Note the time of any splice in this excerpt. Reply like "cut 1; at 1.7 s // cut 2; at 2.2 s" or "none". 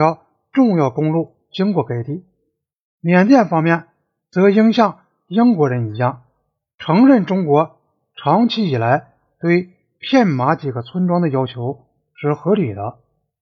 none